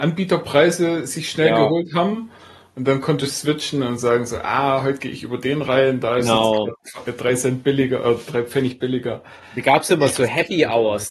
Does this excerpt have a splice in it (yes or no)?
no